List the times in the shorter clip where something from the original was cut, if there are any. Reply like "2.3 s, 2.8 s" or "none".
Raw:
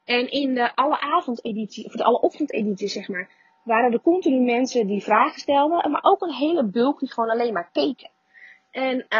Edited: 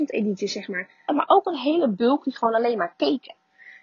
1.1 s